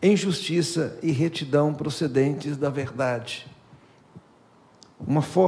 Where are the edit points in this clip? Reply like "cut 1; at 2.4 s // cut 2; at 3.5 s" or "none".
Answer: none